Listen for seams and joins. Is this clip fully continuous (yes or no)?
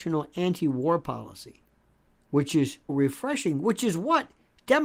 no